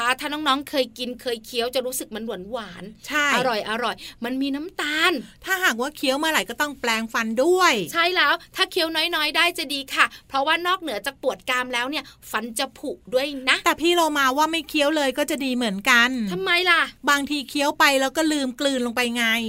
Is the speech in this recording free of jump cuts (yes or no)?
yes